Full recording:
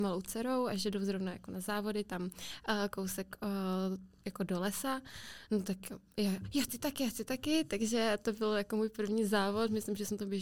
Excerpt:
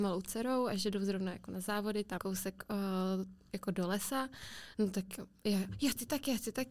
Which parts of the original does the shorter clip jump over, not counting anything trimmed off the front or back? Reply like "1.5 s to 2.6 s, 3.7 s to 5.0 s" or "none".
2.2 s to 2.9 s